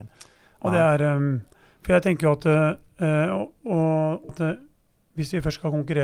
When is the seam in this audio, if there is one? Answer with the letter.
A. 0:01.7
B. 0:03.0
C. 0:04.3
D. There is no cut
C